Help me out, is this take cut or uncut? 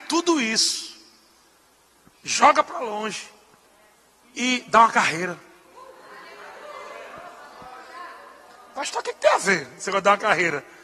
uncut